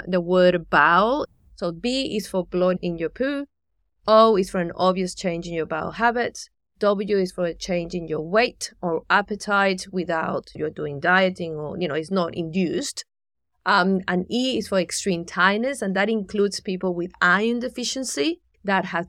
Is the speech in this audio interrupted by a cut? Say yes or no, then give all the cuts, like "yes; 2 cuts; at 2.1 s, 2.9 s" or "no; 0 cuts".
no; 0 cuts